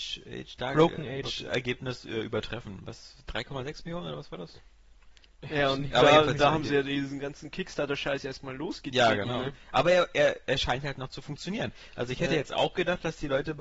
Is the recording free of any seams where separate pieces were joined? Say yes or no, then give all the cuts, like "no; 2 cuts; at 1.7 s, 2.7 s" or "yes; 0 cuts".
no; 1 cut; at 1.2 s